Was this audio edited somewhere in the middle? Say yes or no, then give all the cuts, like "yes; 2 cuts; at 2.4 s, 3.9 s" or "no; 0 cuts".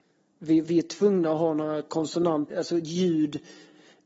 yes; 1 cut; at 2.5 s